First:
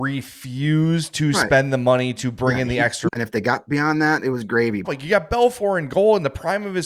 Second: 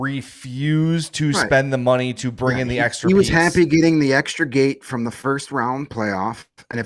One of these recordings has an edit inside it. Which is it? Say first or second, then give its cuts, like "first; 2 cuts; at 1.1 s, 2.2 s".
first; 2 cuts; at 3.1 s, 4.8 s